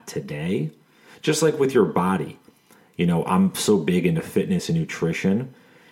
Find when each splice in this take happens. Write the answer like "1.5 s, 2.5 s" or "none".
none